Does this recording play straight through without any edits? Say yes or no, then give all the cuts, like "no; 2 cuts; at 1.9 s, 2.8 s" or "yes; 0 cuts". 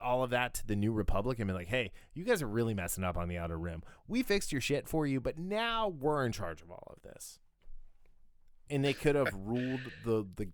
yes; 0 cuts